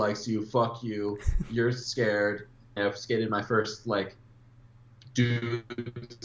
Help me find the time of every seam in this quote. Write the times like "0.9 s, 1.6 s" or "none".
2.8 s